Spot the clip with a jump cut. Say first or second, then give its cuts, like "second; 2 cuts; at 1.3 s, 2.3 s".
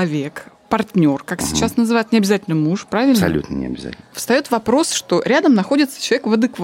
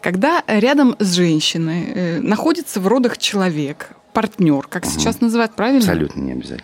second; 1 cut; at 5.5 s